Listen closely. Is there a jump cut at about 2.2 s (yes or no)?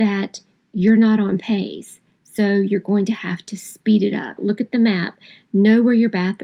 no